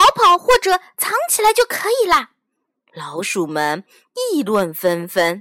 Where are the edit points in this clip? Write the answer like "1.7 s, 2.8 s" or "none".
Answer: 2.7 s